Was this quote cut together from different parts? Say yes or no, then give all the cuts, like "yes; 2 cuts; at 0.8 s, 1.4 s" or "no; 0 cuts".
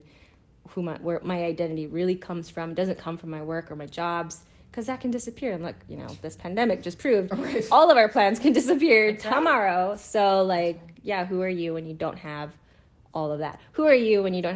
no; 0 cuts